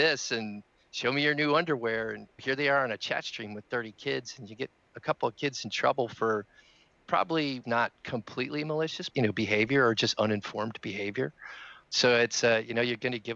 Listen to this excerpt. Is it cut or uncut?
cut